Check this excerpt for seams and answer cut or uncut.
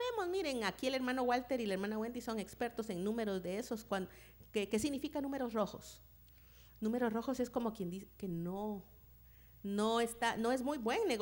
uncut